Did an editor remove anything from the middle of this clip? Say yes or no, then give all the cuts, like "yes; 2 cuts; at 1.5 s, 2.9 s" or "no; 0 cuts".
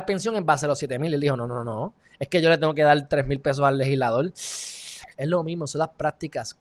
yes; 1 cut; at 5.1 s